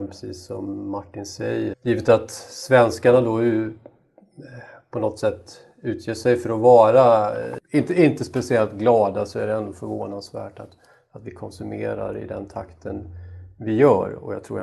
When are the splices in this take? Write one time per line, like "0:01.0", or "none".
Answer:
0:01.7